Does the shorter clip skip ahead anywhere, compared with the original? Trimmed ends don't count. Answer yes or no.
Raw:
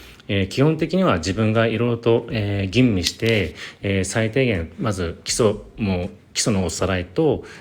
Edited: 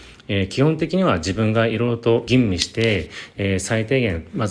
yes